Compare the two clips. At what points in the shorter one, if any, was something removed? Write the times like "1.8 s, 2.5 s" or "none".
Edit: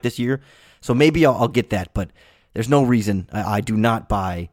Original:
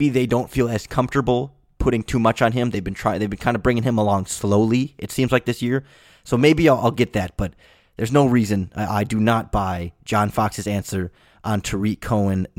none